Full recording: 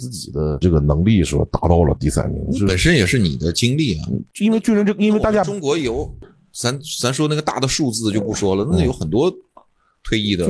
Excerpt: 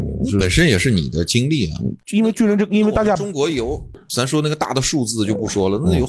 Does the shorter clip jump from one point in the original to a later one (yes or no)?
yes